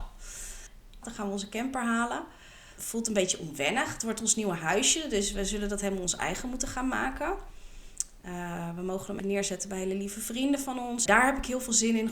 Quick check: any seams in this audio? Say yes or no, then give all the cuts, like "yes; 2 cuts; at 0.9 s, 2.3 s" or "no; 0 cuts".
yes; 3 cuts; at 1.0 s, 9.2 s, 11.1 s